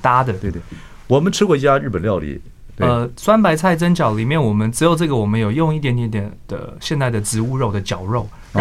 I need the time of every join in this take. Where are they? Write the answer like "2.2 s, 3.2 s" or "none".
2.7 s